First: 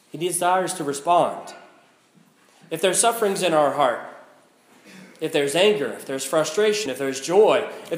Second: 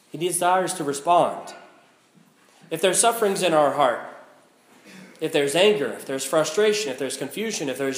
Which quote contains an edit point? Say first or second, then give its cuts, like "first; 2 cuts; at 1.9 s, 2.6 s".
first; 1 cut; at 6.9 s